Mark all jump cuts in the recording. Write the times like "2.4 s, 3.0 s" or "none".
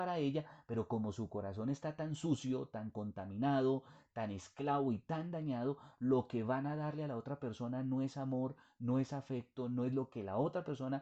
none